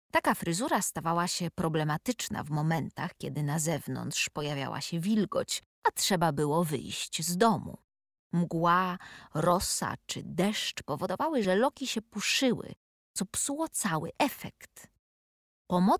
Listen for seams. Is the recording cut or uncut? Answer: uncut